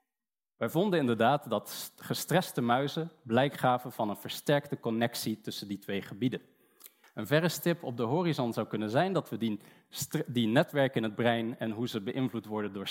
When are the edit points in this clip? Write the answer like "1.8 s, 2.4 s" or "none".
7.0 s

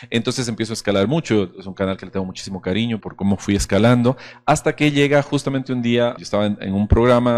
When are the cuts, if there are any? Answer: 3.0 s, 6.2 s

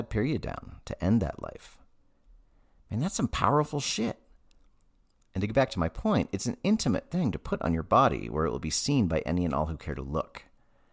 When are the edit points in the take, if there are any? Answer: none

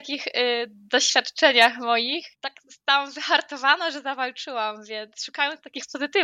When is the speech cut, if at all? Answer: 2.3 s

